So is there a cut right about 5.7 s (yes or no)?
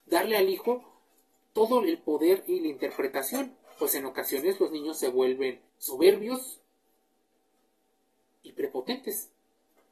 yes